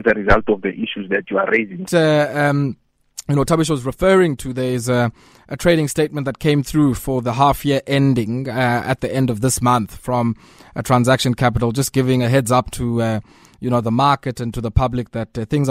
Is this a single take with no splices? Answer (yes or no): no